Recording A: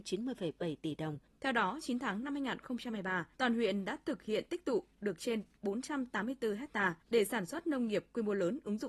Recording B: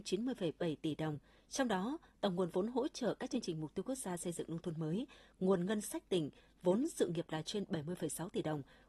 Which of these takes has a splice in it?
A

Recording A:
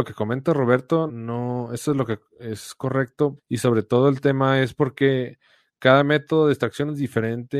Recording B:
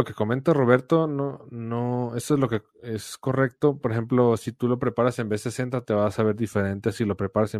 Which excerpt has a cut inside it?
A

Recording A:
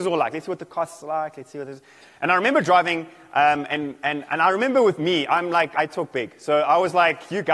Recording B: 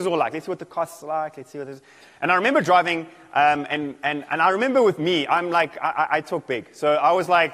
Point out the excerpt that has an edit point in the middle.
A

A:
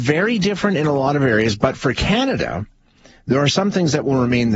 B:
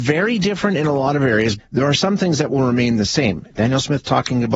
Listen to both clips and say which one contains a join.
B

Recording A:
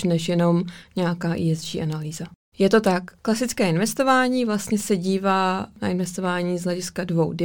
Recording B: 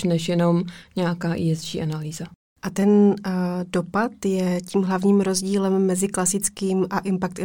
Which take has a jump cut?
A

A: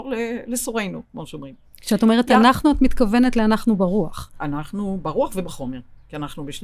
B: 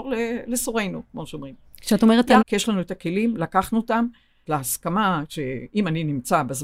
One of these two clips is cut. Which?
B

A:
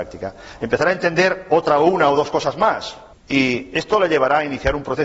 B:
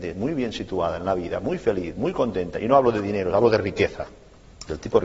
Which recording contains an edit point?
A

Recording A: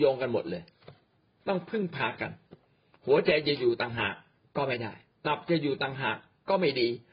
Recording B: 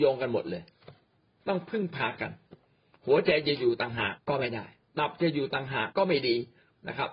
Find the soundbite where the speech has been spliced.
B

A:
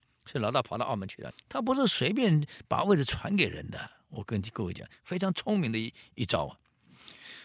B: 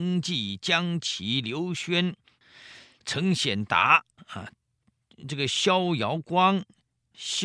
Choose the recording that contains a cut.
A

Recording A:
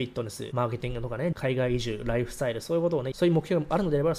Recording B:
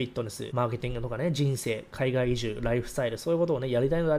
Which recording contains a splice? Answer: A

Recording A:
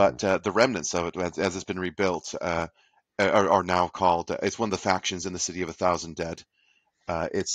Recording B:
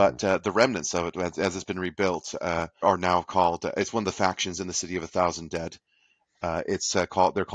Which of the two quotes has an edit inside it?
B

